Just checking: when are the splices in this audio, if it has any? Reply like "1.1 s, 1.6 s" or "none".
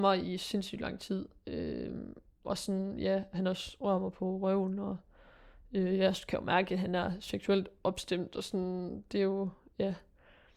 none